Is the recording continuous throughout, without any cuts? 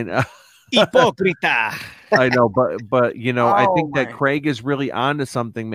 yes; 0 cuts

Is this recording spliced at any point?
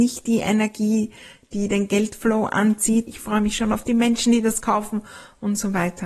yes; 1 cut; at 3.1 s

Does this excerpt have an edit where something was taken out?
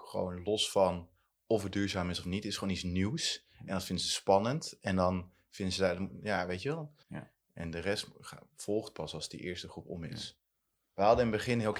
yes; 1 cut; at 7.0 s

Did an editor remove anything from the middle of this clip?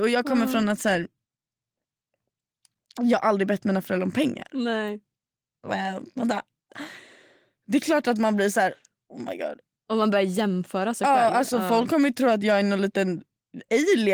yes; 1 cut; at 5.6 s

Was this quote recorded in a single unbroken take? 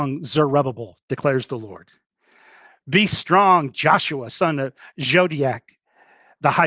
yes; 0 cuts

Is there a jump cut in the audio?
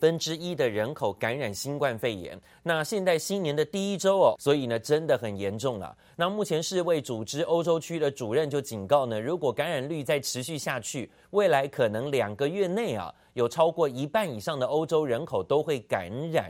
yes; 1 cut; at 4.3 s

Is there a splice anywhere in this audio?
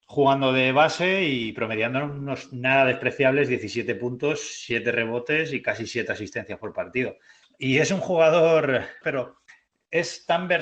yes; 2 cuts; at 7.4 s, 9.0 s

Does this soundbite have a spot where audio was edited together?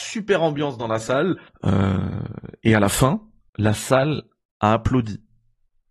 yes; 2 cuts; at 1.5 s, 3.5 s

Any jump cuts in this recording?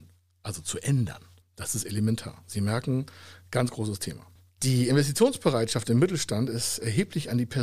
no; 0 cuts

